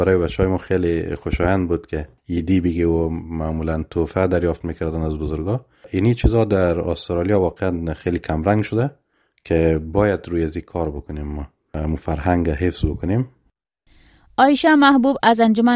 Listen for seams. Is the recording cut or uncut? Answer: uncut